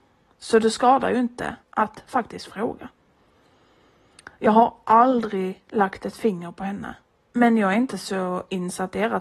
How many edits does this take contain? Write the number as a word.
two